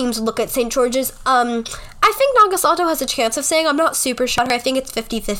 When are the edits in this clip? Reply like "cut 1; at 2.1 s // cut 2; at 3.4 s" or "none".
none